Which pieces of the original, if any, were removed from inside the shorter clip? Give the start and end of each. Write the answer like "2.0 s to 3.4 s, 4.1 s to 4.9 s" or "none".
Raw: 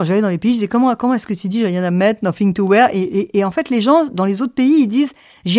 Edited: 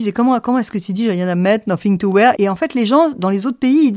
2.9 s to 3.3 s